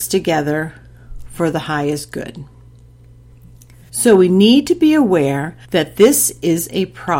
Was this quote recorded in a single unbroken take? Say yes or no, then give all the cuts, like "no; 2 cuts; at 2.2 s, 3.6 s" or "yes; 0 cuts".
no; 2 cuts; at 3.9 s, 5.6 s